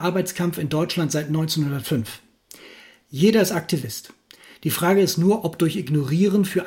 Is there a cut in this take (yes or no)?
no